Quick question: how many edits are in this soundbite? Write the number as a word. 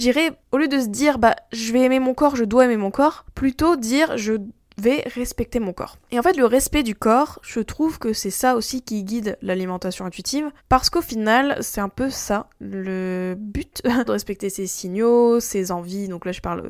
two